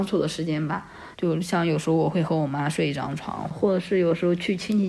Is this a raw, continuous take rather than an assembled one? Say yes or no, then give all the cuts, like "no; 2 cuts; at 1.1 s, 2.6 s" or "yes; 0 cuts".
no; 1 cut; at 1.1 s